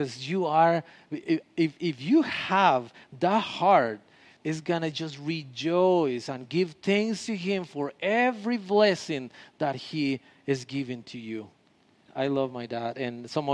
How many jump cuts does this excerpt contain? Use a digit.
2